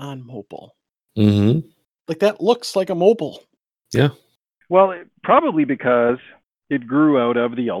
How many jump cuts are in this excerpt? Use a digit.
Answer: 1